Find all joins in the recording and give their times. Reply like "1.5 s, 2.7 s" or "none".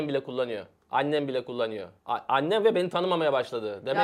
2.0 s

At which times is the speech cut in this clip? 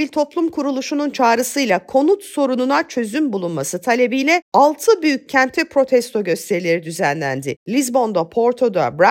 none

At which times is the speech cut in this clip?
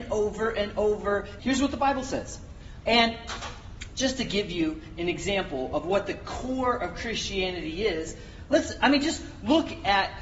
1.4 s, 2.8 s

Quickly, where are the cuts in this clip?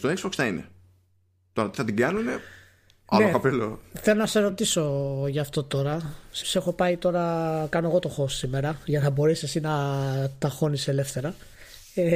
6.4 s

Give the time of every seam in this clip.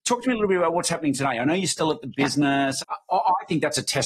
2.8 s

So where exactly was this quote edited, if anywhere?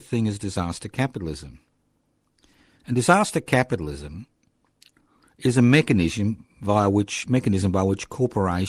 none

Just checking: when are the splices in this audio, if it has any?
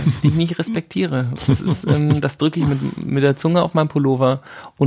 none

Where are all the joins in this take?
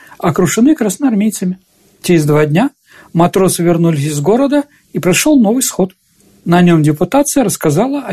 none

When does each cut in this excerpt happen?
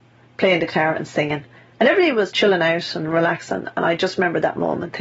2.3 s

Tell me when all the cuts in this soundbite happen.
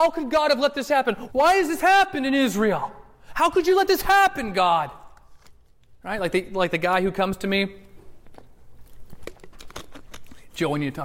1.3 s

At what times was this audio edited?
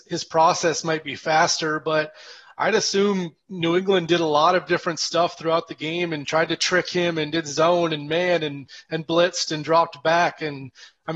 none

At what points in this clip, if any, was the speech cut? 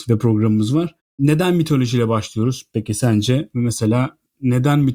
none

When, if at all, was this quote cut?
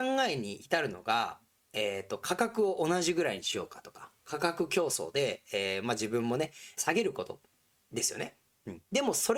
6.8 s

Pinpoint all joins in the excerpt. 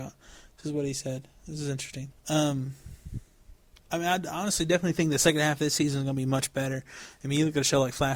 2.1 s

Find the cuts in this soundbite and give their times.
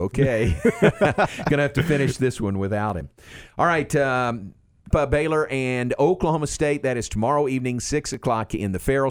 4.9 s

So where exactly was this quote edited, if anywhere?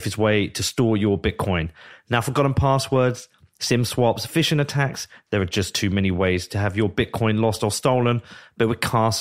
none

